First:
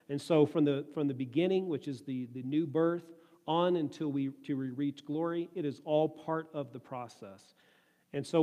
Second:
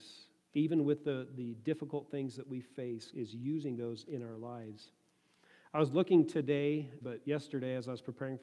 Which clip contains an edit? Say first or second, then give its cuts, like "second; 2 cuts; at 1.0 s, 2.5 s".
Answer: second; 2 cuts; at 3.1 s, 7.0 s